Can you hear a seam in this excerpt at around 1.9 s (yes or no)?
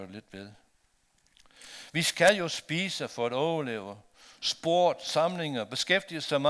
yes